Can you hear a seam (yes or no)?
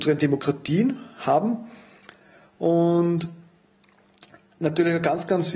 no